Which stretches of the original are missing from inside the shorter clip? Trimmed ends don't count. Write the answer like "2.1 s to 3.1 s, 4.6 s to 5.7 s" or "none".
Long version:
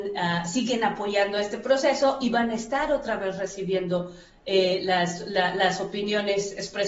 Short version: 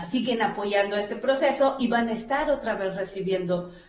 none

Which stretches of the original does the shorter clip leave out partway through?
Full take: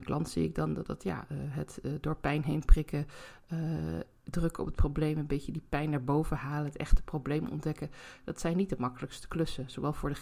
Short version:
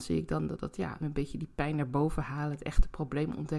1.3 s to 5.1 s

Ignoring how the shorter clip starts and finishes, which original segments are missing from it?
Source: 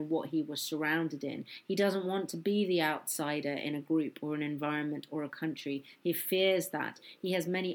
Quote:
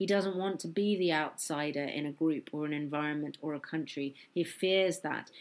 none

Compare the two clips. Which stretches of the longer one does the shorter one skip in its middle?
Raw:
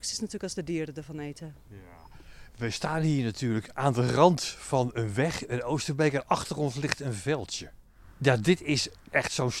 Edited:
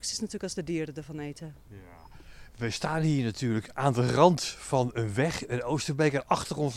none

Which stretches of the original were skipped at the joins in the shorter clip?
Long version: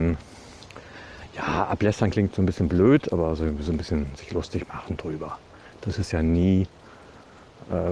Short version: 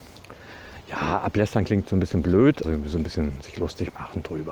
3.1 s to 3.4 s

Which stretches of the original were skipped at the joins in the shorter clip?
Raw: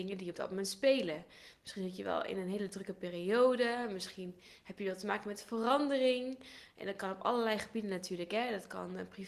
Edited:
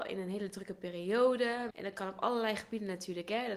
3.9 s to 6.7 s

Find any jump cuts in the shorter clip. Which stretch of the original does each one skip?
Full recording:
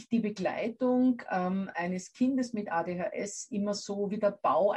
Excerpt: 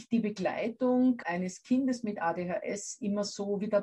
1.2 s to 1.7 s

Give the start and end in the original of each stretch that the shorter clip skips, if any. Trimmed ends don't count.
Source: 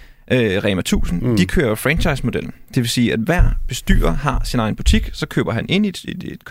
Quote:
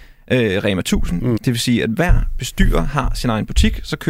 1.4 s to 2.7 s

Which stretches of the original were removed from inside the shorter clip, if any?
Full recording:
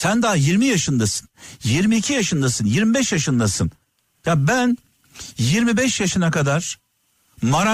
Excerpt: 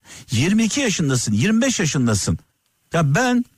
none

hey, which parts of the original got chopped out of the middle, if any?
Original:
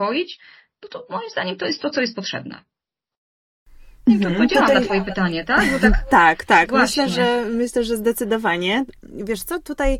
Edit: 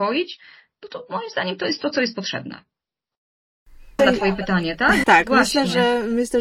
4.0 s to 4.7 s, 5.7 s to 6.5 s

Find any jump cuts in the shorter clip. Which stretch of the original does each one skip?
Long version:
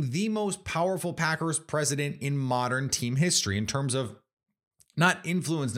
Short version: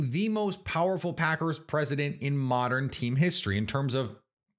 none

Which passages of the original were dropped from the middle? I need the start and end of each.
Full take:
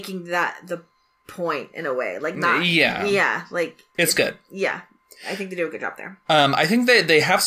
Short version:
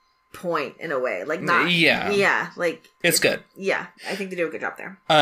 4.9 s to 5.2 s

